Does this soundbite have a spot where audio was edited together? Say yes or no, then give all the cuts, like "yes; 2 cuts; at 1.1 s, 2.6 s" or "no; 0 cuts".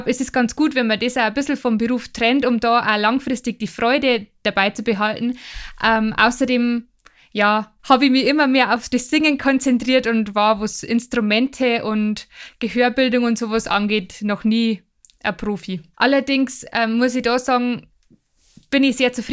yes; 2 cuts; at 7.8 s, 15.9 s